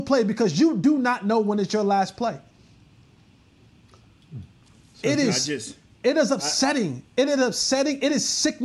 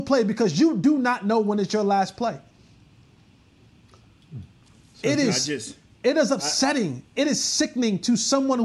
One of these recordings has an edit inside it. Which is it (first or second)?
second